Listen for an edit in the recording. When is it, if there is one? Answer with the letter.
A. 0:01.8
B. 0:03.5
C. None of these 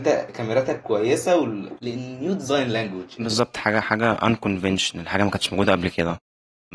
A